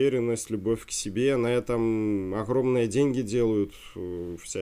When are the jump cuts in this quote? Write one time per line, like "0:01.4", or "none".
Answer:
none